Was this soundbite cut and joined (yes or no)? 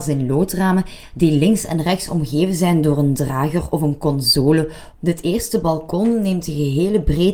yes